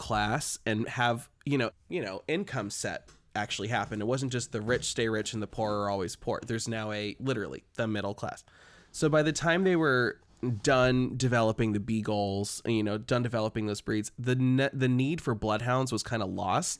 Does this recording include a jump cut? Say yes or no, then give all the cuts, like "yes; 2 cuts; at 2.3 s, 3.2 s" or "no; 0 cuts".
yes; 2 cuts; at 1.7 s, 8.8 s